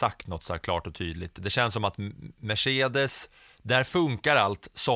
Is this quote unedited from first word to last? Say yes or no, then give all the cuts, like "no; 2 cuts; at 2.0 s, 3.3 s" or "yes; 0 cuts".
yes; 0 cuts